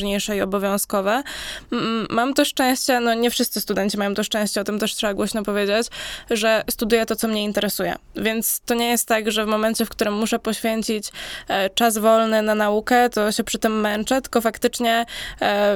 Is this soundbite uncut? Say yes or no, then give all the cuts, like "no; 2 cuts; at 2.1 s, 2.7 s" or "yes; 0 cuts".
yes; 0 cuts